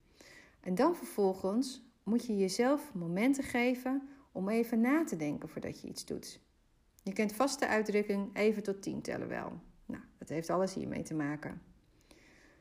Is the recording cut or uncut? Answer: uncut